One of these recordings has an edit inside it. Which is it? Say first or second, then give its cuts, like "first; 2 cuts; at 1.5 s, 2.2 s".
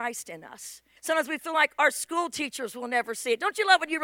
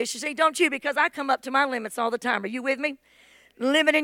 first; 1 cut; at 1.0 s